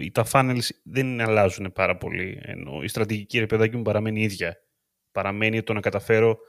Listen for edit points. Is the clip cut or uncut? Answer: uncut